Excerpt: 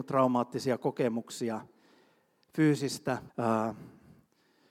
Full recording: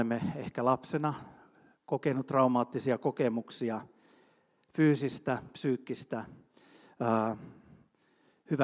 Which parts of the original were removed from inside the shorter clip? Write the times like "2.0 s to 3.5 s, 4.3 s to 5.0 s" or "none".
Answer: 5.5 s to 6.9 s